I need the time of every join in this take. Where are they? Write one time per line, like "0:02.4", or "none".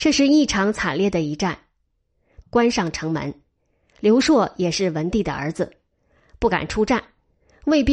0:02.4